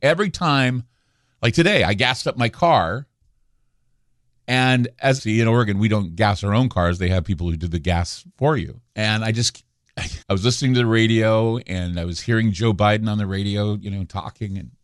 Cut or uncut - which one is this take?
cut